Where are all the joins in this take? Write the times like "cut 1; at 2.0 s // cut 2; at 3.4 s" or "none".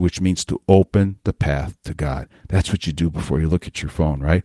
none

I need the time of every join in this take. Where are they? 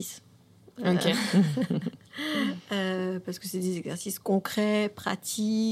none

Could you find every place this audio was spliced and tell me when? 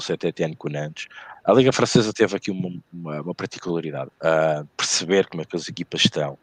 cut 1; at 1.4 s // cut 2; at 4.1 s

